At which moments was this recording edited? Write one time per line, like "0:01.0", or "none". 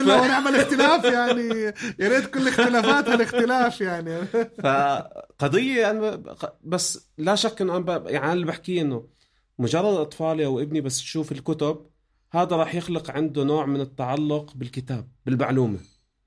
none